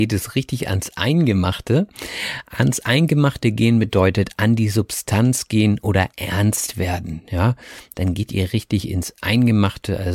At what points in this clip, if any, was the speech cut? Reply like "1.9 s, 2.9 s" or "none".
7.9 s

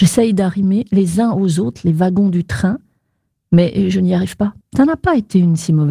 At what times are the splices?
4.6 s

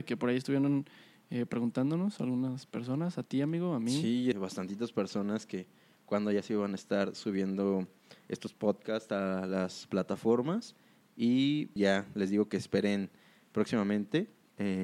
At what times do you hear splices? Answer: 4.3 s, 11.8 s

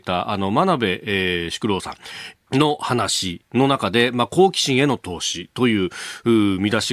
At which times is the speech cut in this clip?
2.3 s

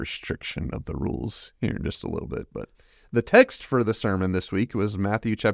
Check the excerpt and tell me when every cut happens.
none

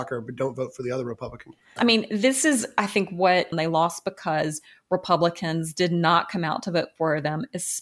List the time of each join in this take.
1.8 s, 3.5 s

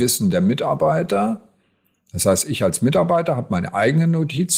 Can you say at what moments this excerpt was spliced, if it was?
none

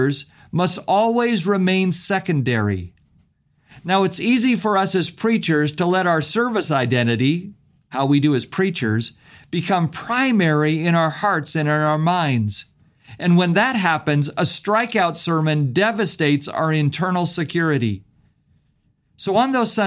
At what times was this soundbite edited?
none

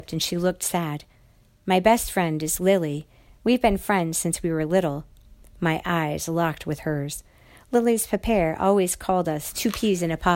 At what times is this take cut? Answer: none

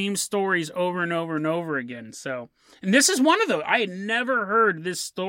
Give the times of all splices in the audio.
none

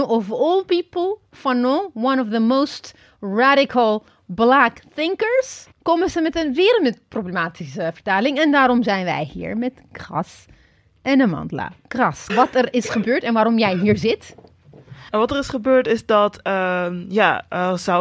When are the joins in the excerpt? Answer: 5.7 s, 12.3 s

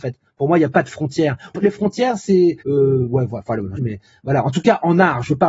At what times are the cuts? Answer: 1.5 s, 2.6 s, 3.8 s

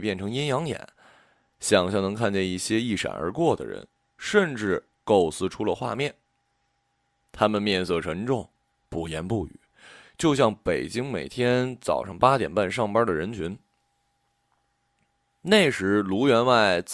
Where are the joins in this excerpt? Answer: none

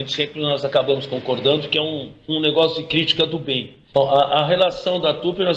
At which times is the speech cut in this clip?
2.3 s, 3.9 s

